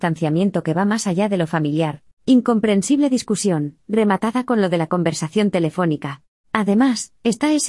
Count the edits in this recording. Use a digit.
2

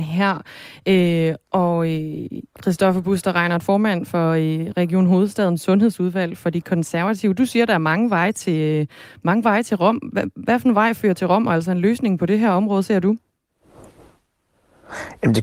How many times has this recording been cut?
0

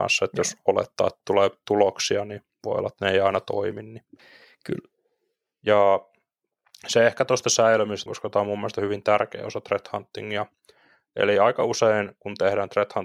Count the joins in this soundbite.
1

